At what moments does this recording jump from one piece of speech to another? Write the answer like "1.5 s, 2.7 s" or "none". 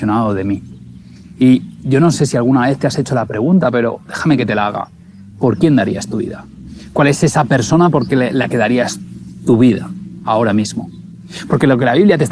none

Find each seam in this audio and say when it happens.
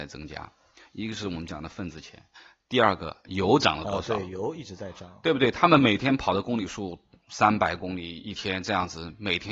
none

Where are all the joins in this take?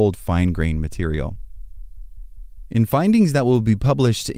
none

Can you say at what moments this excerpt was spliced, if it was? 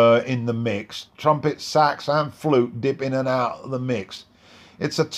1.1 s

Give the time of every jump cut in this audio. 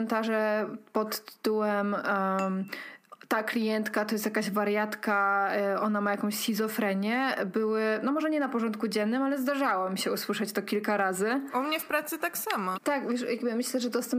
12.7 s

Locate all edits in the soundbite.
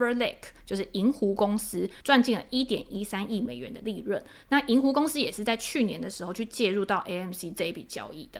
2.0 s

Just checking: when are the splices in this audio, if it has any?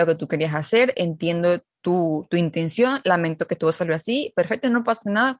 none

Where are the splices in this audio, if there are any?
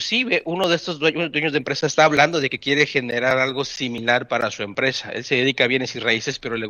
none

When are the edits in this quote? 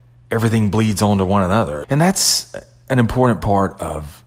1.8 s

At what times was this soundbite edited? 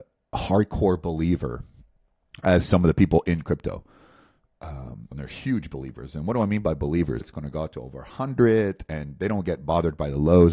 5.1 s, 7.2 s

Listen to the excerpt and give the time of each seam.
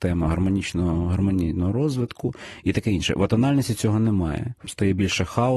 4.6 s

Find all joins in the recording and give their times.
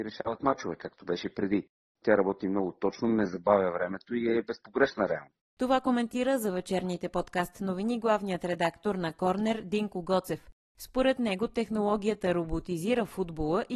2.0 s, 5.4 s

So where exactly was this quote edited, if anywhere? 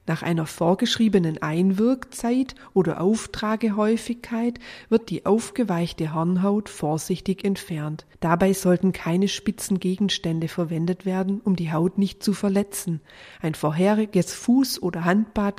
8.1 s

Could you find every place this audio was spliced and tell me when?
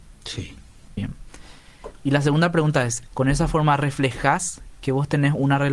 1.0 s, 3.1 s

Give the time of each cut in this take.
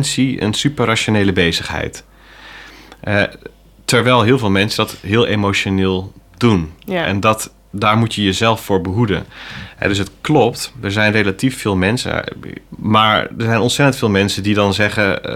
12.7 s

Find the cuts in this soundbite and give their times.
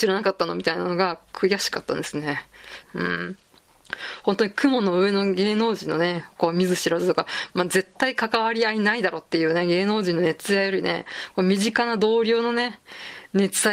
2.8 s

